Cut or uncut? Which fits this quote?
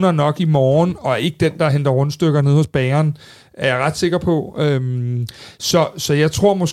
uncut